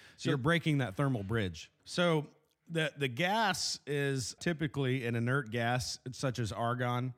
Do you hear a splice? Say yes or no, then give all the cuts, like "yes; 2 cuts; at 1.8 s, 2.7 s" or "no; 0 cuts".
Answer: yes; 2 cuts; at 1.8 s, 4.4 s